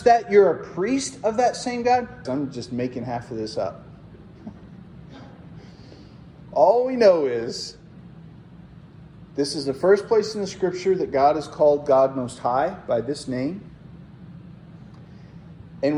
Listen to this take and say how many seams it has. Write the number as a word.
one